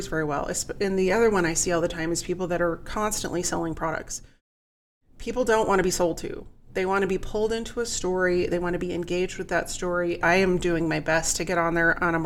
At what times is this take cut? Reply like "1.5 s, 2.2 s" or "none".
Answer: 10.2 s